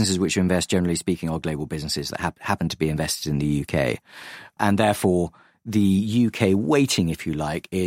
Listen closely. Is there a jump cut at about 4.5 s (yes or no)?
no